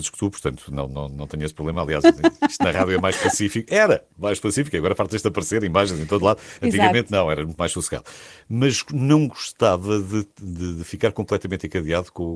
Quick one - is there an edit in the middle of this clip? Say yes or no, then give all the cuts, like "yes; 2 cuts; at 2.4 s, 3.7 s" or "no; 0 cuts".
no; 0 cuts